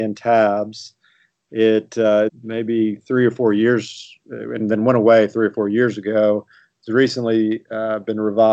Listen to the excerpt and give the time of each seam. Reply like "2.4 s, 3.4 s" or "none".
2.3 s